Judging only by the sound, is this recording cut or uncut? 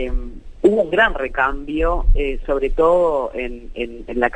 uncut